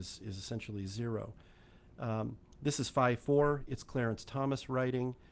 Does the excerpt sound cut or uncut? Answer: uncut